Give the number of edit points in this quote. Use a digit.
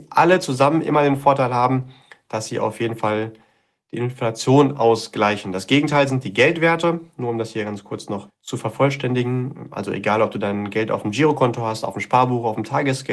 1